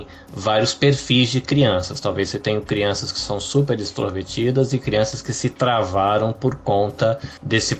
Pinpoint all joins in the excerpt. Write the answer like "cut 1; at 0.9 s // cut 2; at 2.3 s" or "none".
none